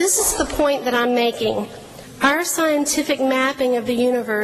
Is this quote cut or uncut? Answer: uncut